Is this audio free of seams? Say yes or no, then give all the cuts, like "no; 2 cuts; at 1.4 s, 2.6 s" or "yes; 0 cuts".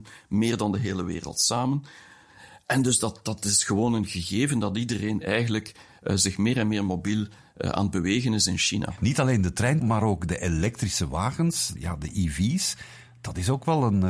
no; 2 cuts; at 9.8 s, 11.8 s